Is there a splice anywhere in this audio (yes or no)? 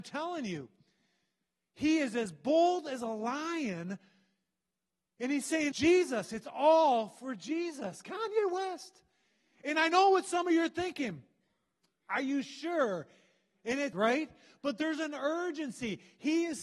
yes